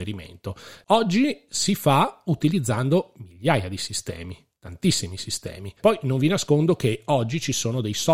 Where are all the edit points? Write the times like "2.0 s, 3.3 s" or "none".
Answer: 5.8 s